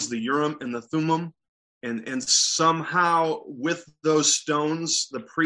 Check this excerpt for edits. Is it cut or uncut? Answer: uncut